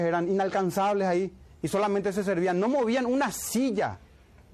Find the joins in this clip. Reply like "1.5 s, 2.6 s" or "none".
none